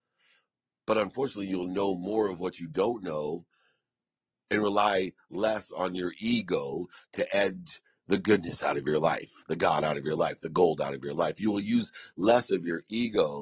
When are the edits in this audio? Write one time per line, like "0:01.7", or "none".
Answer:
none